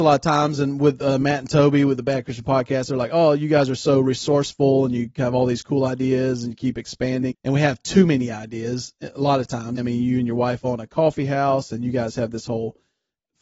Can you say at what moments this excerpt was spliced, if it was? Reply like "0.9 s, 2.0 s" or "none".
7.3 s, 9.8 s